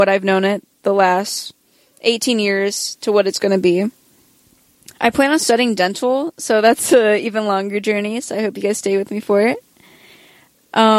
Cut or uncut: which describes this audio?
uncut